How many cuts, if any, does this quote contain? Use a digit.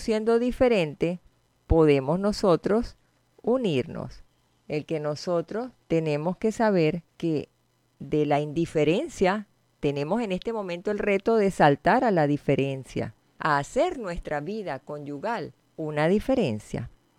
0